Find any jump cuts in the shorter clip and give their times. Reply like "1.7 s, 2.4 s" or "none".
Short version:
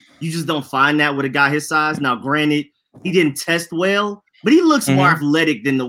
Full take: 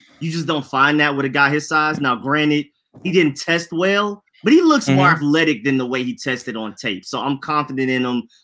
none